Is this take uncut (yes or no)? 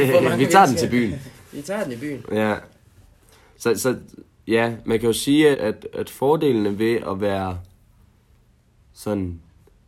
no